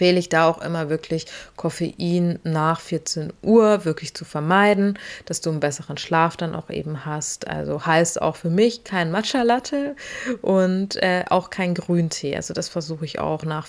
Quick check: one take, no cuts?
yes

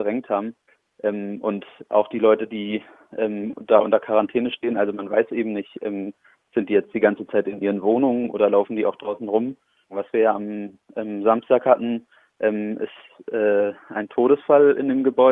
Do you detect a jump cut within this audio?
yes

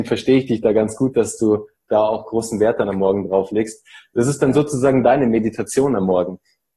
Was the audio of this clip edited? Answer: no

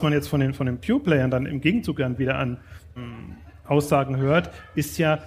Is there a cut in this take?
yes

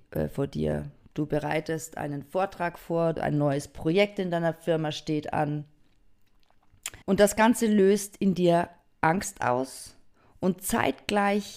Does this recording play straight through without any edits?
no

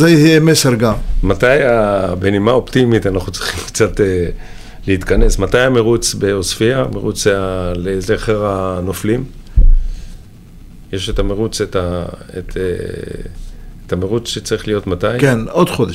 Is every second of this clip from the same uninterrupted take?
yes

